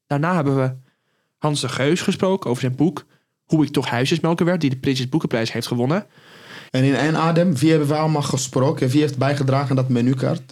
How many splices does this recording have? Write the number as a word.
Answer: one